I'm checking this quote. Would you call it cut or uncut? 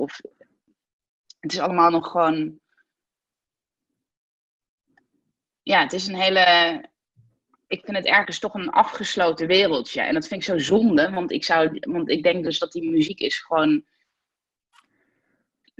uncut